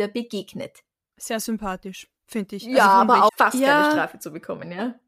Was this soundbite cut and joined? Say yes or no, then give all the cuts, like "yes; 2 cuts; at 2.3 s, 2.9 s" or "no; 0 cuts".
yes; 1 cut; at 3.3 s